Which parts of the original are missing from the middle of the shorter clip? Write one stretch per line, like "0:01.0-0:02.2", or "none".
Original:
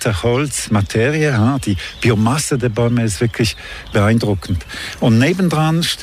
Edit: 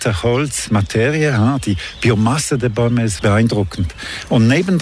0:03.2-0:03.9